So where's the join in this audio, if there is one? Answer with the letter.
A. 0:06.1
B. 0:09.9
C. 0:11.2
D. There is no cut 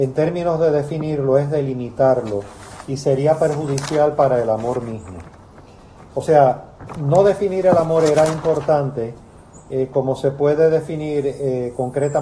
D